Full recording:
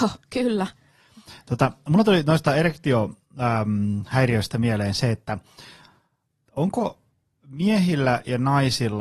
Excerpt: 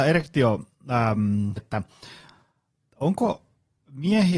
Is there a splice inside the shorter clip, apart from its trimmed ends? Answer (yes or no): yes